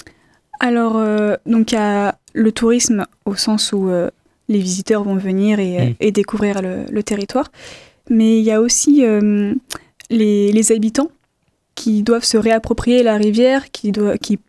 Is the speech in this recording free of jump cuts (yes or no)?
yes